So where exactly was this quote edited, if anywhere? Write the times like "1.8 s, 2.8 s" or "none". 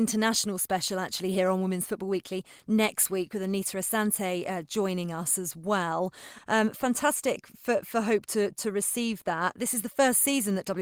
6.4 s